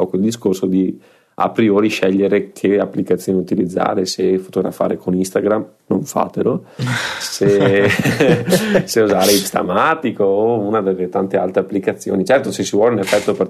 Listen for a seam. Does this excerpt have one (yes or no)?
no